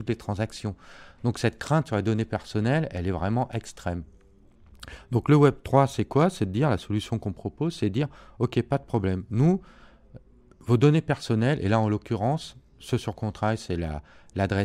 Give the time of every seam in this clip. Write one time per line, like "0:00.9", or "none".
none

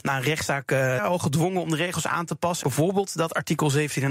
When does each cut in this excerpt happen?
0:01.0
0:02.6

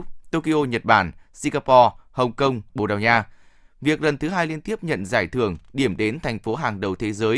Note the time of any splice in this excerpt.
0:02.7

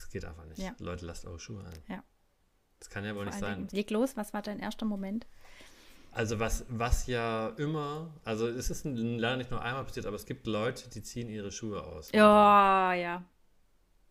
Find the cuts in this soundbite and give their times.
0:03.7

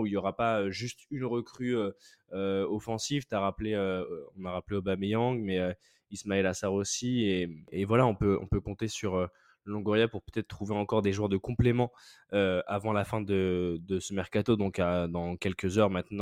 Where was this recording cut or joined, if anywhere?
none

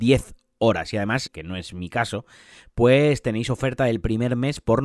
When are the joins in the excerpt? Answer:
0:01.3

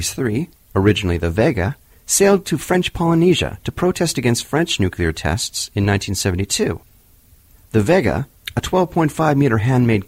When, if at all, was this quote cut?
none

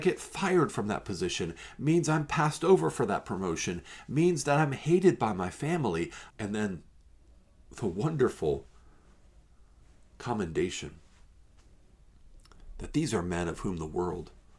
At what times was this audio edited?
0:06.3

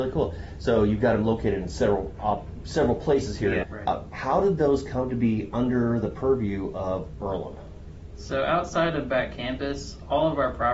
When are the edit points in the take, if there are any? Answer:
0:03.6

